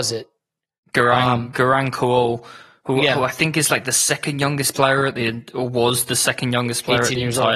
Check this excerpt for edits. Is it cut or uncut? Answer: uncut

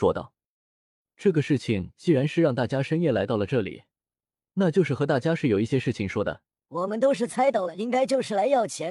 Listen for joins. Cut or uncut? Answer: cut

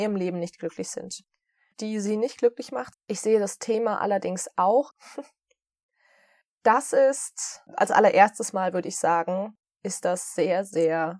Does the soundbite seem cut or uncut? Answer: cut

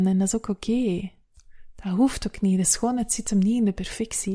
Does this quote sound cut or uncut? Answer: uncut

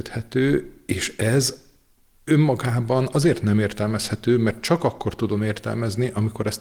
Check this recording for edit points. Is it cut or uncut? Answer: uncut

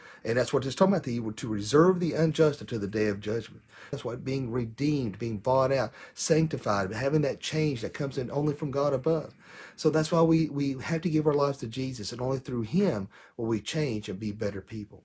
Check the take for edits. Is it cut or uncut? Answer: cut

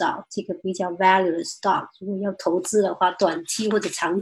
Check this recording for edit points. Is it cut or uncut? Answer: uncut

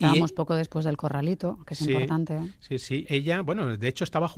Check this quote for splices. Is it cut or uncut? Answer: cut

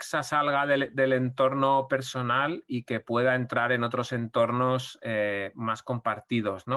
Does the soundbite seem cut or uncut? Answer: uncut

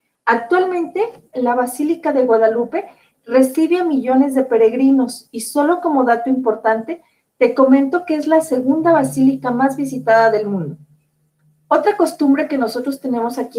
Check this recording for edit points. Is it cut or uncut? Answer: cut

